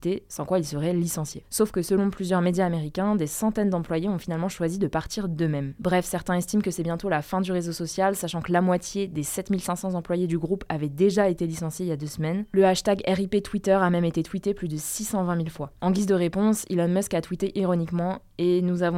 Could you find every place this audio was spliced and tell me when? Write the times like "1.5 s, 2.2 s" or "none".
none